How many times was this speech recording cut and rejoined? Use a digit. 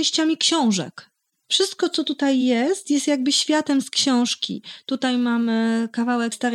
0